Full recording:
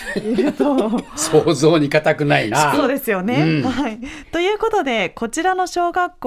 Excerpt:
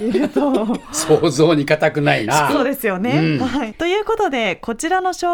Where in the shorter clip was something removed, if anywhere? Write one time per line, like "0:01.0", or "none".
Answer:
0:03.7